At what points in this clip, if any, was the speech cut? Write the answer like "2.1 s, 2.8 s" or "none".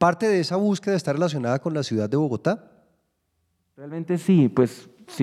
none